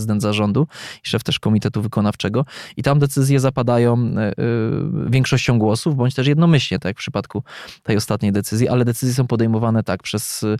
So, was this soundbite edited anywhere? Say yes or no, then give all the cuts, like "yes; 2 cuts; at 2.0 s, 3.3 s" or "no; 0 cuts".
no; 0 cuts